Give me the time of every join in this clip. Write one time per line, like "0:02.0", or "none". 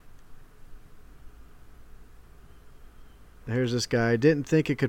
none